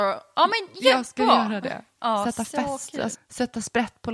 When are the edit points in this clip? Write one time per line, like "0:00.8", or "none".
0:02.0
0:03.1